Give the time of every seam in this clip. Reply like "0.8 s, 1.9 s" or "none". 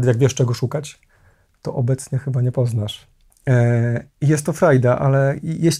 3.3 s